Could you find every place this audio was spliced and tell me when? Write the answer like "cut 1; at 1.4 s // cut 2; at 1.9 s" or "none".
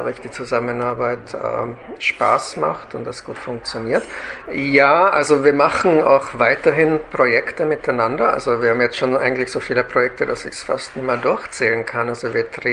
cut 1; at 4.5 s

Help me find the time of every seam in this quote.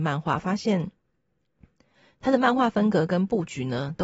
none

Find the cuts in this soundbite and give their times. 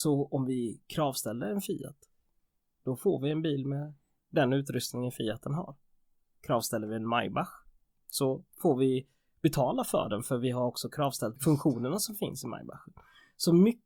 cut 1; at 8.5 s

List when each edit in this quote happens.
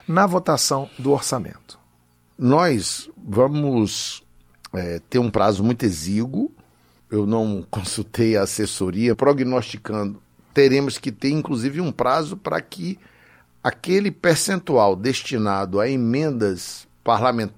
cut 1; at 9.1 s

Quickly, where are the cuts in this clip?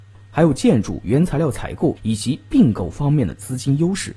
cut 1; at 2.0 s

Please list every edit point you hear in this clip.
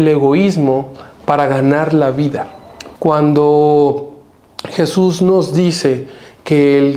cut 1; at 2.9 s

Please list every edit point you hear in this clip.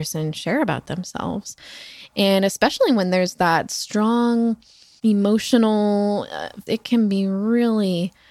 cut 1; at 6.7 s

